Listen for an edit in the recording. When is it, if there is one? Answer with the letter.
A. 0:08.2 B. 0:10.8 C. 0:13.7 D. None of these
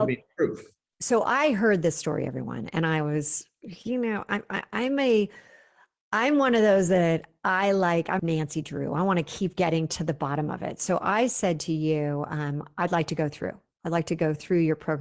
A